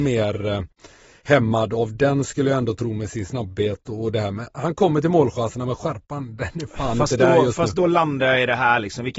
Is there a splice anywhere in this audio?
no; 0 cuts

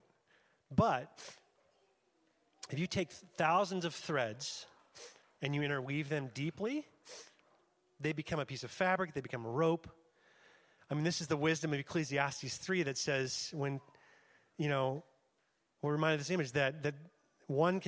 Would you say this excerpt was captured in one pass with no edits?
yes; 0 cuts

